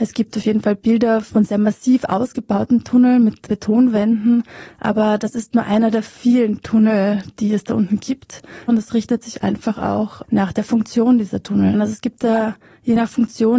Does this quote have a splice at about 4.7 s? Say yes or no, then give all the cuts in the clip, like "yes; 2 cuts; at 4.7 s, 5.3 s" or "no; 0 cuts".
no; 1 cut; at 11.7 s